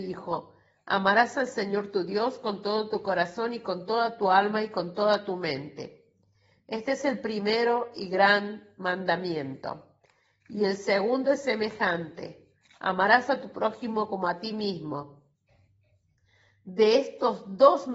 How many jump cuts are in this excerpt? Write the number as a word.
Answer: zero